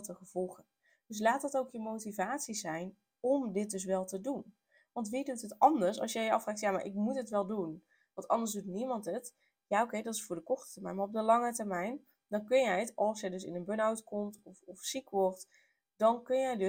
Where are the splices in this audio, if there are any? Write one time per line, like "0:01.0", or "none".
none